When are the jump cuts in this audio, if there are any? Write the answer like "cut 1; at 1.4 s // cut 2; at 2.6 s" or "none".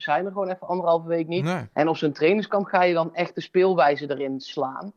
cut 1; at 1.7 s